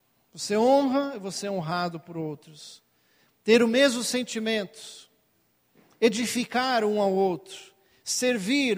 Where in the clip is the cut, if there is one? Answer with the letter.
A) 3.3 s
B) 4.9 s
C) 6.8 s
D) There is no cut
D